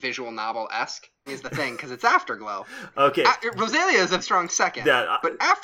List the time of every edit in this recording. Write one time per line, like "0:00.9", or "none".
0:01.3
0:04.2

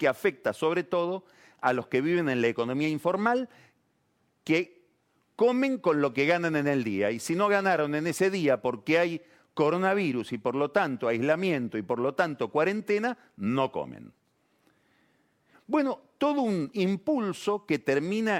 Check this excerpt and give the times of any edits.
0:15.5

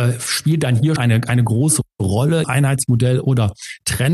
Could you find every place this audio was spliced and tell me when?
0:01.0
0:02.4

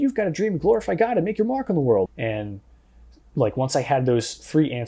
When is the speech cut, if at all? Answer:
0:02.1

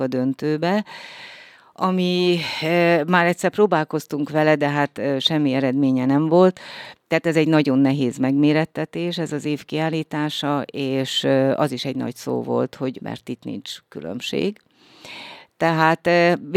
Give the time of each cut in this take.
0:13.0

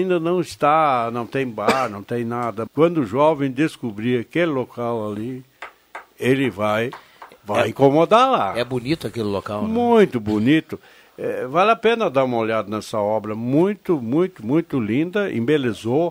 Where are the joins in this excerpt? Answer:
0:02.7

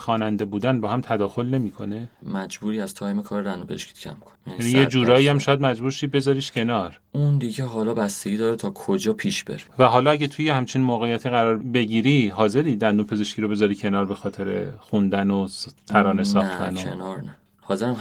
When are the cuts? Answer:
none

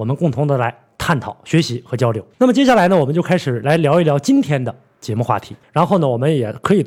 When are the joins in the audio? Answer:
0:02.3
0:05.6

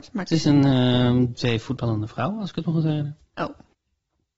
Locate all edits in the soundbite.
0:01.3
0:03.3

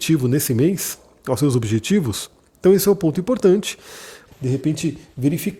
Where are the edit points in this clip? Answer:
0:04.3

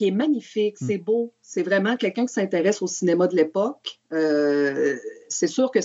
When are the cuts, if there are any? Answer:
none

